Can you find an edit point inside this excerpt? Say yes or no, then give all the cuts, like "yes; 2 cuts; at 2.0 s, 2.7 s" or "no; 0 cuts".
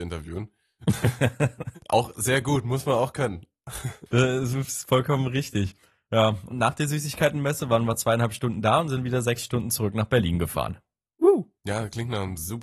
yes; 1 cut; at 6.5 s